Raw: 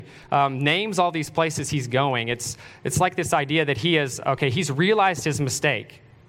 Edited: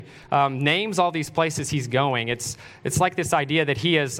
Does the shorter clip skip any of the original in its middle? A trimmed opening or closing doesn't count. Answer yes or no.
no